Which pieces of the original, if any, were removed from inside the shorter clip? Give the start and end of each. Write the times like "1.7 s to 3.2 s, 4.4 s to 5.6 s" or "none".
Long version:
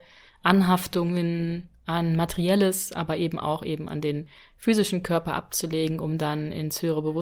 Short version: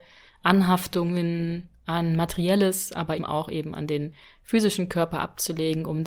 3.2 s to 3.3 s